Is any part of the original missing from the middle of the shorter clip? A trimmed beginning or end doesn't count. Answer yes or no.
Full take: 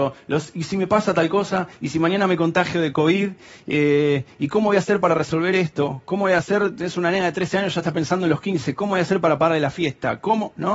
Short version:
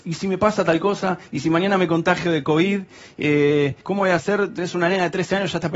yes